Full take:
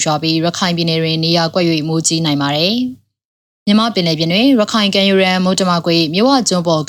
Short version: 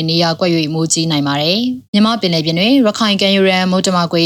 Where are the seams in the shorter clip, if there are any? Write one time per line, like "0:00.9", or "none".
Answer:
0:01.9